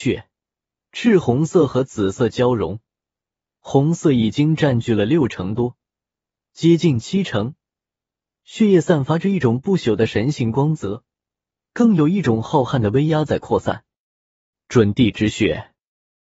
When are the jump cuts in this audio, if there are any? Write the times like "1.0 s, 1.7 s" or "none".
none